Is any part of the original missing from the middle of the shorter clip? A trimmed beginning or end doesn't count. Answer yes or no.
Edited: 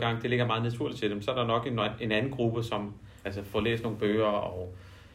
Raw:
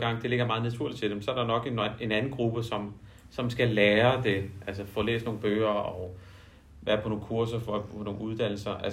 yes